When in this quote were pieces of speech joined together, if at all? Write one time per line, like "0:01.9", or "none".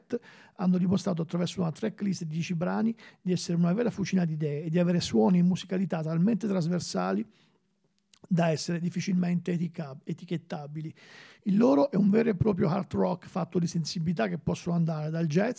none